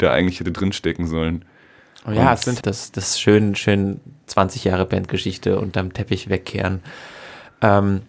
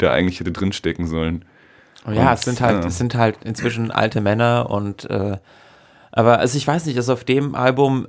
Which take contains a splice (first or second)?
first